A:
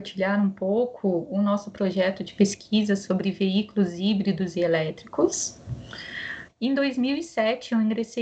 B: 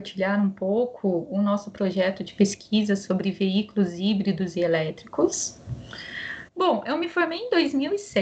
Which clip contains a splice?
A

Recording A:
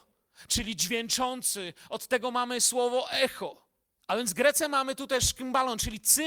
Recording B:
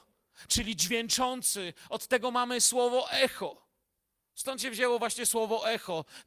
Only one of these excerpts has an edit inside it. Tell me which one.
A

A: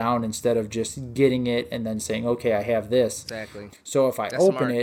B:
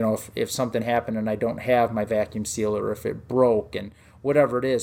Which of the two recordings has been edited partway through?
A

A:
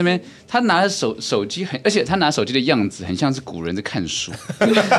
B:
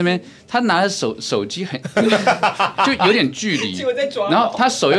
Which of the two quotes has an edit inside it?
B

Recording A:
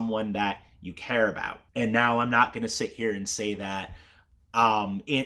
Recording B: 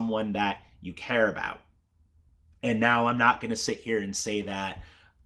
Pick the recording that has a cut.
A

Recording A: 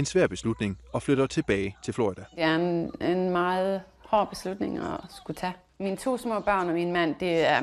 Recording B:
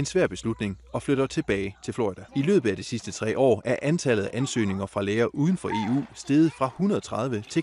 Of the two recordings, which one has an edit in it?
B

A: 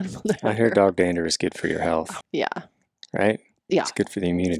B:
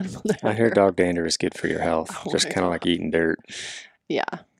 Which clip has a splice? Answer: A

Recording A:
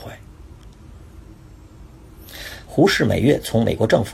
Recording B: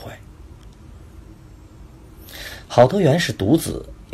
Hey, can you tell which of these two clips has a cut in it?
A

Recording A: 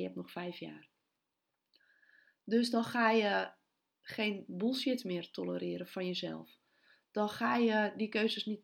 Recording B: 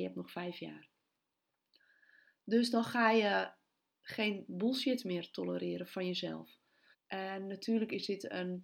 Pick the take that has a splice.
B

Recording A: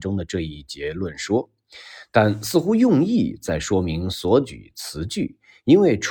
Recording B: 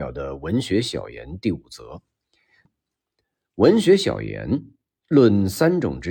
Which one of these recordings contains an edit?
B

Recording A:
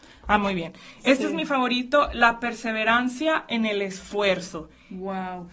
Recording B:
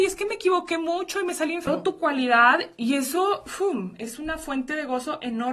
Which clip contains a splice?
B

